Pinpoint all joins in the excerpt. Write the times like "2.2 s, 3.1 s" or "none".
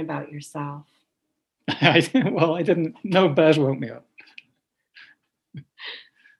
1.6 s